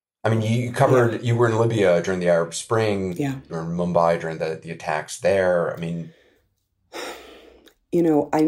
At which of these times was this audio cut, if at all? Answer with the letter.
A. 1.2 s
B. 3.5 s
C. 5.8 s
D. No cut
B